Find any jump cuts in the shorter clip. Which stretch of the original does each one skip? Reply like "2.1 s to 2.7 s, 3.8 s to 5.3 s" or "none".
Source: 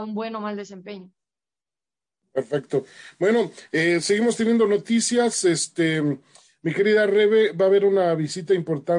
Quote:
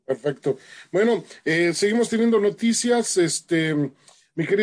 none